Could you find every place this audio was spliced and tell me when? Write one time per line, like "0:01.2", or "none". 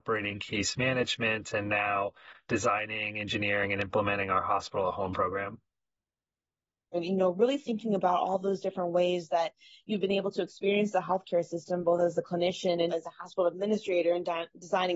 0:06.9
0:12.9